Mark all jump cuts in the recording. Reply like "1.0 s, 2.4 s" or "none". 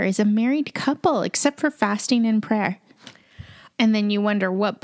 3.7 s